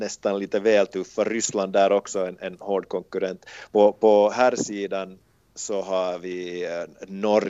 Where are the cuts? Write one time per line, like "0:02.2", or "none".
none